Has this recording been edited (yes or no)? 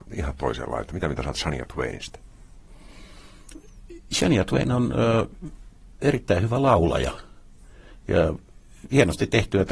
no